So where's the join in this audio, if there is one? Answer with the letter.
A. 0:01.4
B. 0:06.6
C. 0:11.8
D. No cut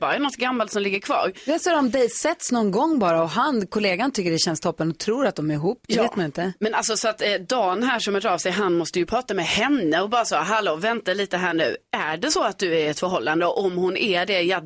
D